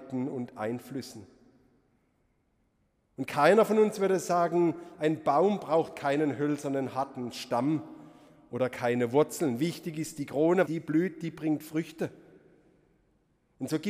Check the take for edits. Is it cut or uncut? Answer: cut